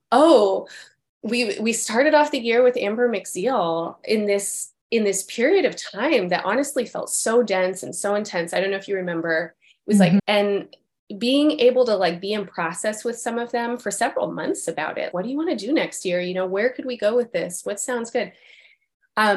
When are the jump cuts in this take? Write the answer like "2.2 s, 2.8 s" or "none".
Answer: 10.2 s, 15.1 s